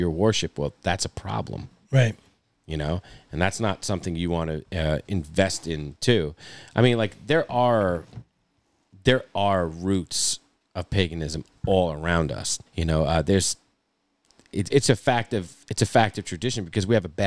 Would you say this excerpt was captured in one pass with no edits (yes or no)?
no